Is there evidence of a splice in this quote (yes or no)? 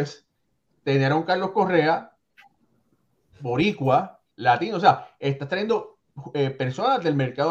no